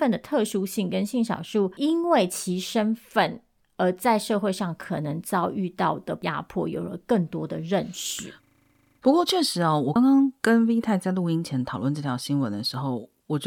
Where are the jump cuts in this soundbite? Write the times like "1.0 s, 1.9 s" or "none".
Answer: 10.0 s

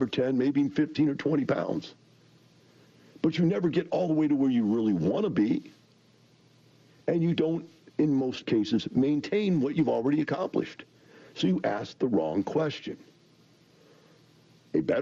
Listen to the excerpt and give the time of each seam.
none

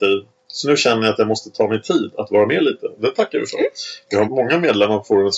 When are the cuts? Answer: 4.3 s

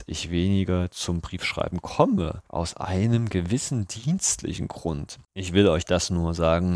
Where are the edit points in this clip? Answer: none

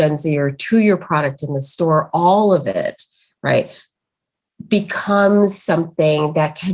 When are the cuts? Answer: none

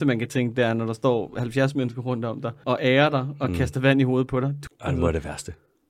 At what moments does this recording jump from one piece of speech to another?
2.6 s, 4.7 s

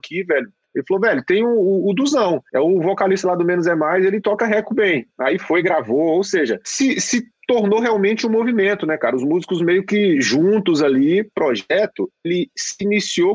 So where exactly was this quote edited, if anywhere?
none

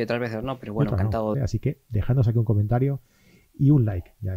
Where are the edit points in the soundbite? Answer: 1.3 s

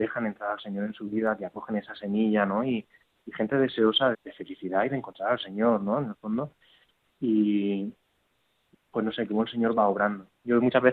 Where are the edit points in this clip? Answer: 4.1 s, 8.7 s

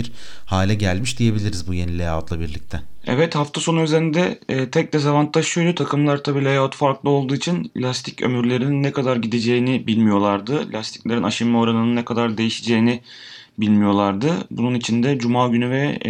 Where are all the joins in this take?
none

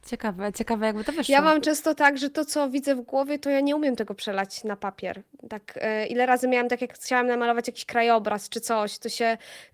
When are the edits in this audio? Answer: none

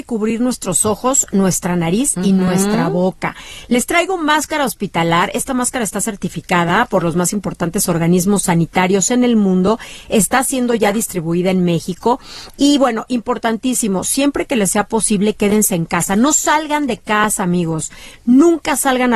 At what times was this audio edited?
none

